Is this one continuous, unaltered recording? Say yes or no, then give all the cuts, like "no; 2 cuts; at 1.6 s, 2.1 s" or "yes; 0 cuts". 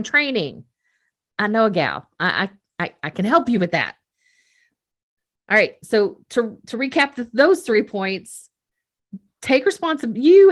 yes; 0 cuts